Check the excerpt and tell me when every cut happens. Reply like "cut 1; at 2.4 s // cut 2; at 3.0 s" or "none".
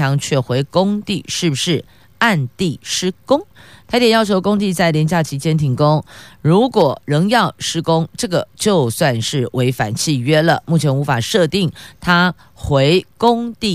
none